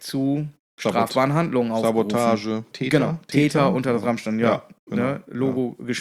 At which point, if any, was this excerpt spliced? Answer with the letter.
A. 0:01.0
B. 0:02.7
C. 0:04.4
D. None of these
B